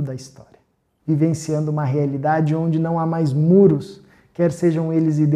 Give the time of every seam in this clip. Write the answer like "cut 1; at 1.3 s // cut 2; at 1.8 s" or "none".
cut 1; at 1.0 s